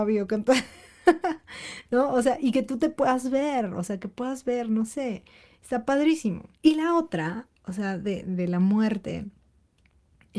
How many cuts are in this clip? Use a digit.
2